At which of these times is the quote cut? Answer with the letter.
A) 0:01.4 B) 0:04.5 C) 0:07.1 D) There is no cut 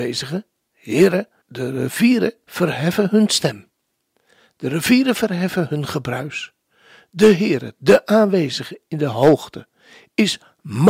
A